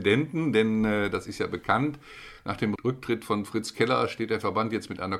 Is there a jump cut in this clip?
no; 0 cuts

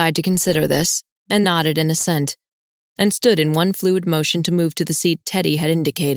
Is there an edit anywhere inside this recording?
yes; 1 cut; at 1.4 s

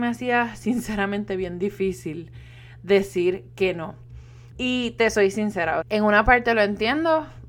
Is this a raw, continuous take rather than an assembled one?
no; 2 cuts; at 4.5 s, 5.8 s

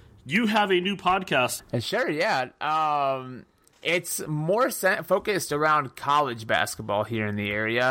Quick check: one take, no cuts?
no; 1 cut; at 1.6 s

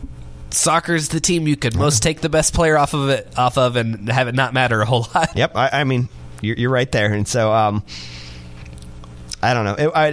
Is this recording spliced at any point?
yes; 1 cut; at 5.3 s

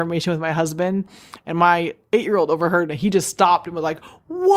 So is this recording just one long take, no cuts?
yes; 0 cuts

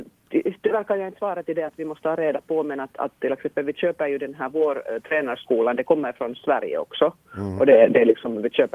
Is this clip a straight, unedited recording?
yes; 0 cuts

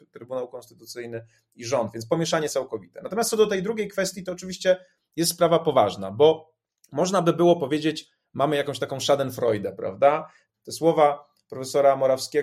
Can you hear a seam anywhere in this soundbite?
yes; 1 cut; at 10.5 s

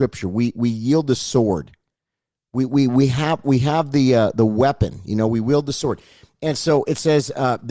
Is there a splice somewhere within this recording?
no; 0 cuts

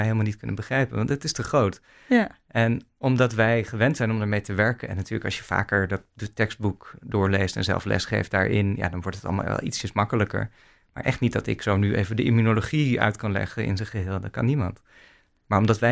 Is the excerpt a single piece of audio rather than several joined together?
yes; 0 cuts

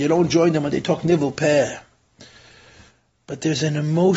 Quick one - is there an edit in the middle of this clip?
no; 0 cuts

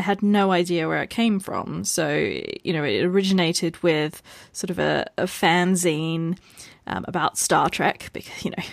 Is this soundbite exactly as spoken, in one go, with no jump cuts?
yes; 0 cuts

